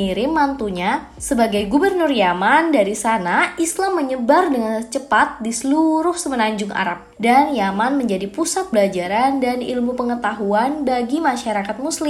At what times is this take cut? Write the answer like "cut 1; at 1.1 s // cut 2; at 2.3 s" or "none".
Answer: cut 1; at 8.7 s